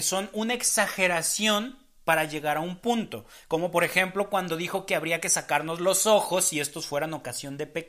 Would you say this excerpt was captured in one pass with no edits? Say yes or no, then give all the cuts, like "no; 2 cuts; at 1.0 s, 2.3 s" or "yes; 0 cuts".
yes; 0 cuts